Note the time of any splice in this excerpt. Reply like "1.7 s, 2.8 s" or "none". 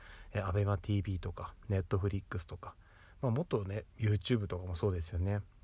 3.9 s